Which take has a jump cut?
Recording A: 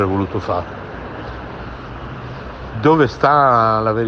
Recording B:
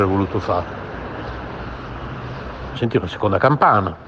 B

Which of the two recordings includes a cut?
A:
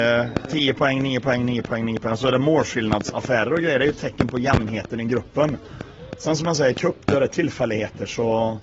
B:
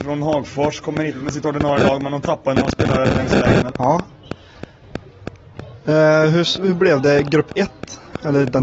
B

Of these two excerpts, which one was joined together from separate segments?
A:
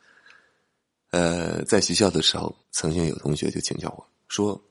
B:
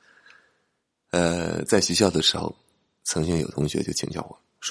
A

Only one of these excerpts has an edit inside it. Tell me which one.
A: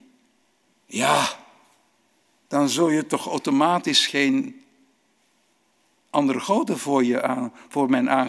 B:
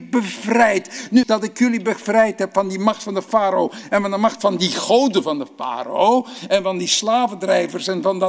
B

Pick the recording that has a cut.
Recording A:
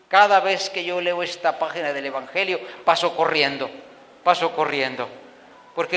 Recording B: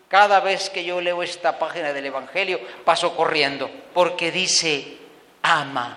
B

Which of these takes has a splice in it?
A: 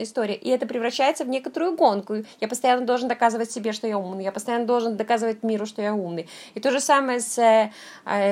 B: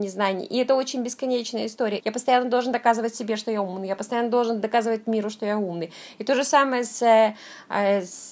B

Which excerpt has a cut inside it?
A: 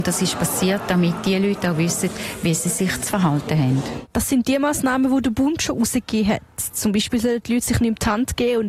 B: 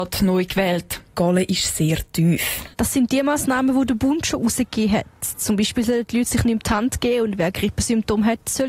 B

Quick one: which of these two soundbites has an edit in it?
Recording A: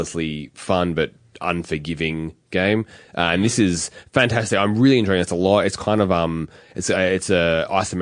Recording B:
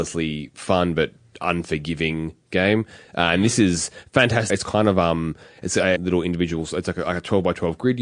B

